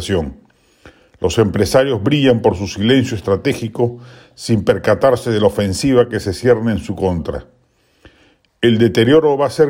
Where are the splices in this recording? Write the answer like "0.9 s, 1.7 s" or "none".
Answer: none

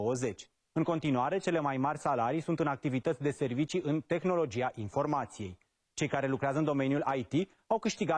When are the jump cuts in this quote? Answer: none

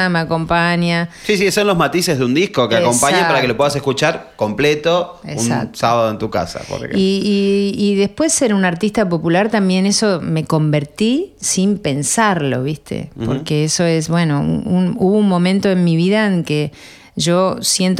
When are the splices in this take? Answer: 14.6 s

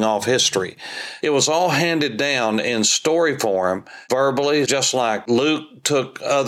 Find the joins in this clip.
1.2 s, 4.6 s

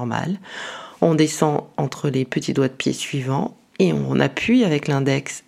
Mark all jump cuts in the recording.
none

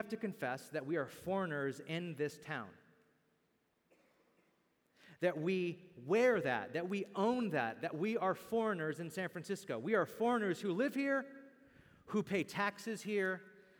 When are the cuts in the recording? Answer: none

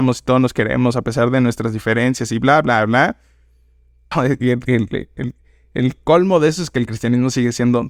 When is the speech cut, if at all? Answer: 4.1 s

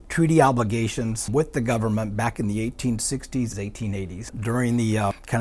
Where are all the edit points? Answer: 3.5 s

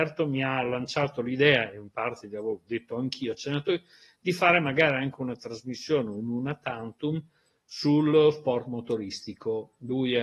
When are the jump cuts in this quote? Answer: none

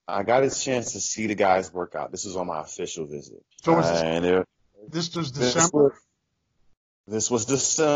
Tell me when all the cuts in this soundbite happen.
3.5 s

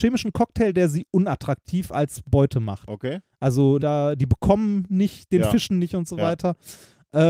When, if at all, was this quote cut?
3.8 s

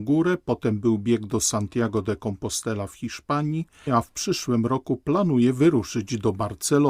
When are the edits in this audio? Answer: 3.9 s

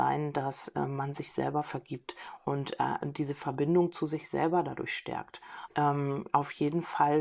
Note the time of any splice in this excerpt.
5.7 s

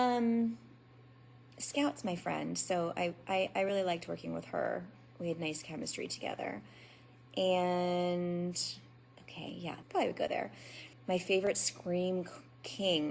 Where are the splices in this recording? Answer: 9.8 s, 10.9 s

